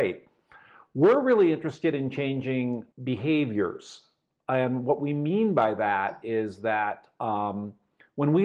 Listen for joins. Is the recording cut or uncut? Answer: cut